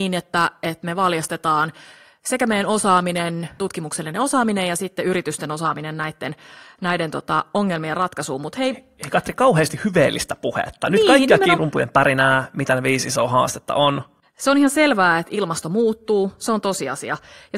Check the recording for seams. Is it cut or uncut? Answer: cut